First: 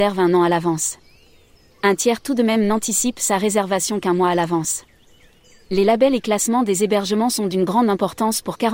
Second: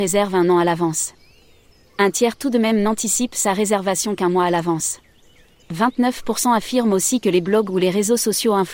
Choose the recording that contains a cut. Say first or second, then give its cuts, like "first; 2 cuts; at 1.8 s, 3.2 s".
second; 1 cut; at 5.6 s